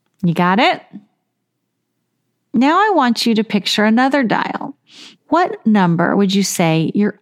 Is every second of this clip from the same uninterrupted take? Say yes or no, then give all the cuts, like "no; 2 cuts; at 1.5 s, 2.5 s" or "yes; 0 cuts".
no; 1 cut; at 5.1 s